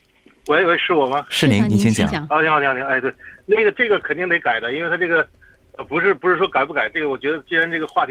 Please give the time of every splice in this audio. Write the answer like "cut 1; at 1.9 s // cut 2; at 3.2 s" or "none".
none